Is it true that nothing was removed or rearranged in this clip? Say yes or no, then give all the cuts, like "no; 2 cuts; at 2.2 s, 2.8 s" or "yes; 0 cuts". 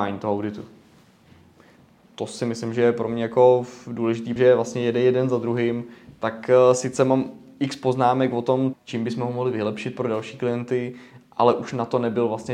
no; 2 cuts; at 4.4 s, 8.7 s